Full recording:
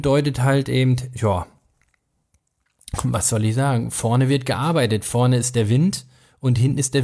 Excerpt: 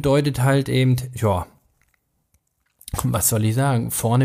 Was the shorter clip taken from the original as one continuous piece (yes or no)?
yes